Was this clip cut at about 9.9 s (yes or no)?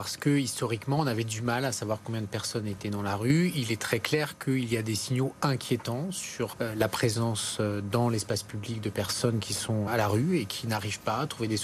yes